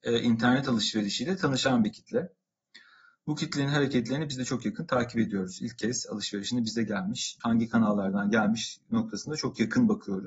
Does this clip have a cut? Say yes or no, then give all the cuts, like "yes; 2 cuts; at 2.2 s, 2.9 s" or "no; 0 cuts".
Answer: yes; 1 cut; at 7.4 s